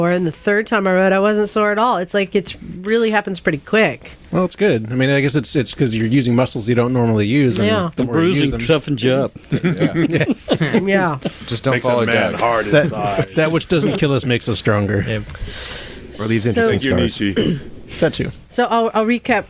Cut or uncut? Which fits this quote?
uncut